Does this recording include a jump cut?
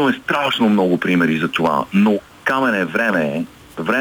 no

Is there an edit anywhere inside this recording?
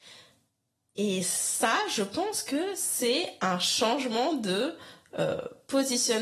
no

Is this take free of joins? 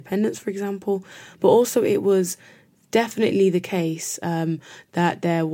yes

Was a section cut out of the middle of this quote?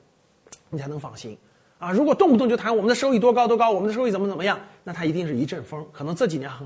no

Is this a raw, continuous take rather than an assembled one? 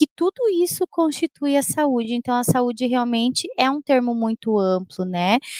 yes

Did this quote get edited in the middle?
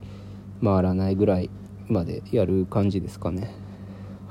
no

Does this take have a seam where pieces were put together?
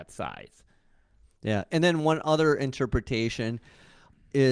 no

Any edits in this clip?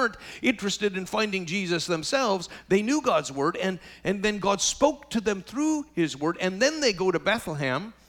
no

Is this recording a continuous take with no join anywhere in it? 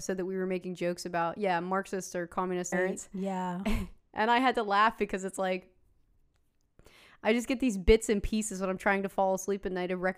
no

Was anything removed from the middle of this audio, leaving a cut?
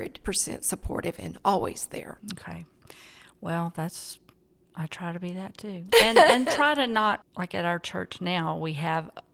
no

